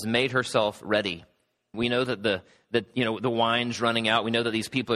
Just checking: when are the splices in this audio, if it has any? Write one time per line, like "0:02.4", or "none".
0:01.7